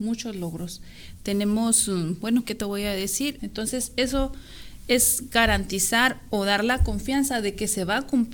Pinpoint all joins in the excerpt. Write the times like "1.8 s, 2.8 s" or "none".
3.4 s